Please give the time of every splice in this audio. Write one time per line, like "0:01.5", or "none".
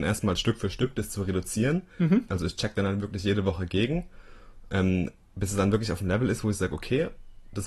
0:02.3